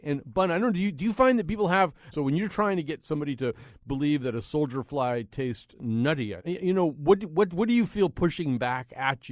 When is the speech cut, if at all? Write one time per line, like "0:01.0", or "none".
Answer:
0:02.1
0:06.4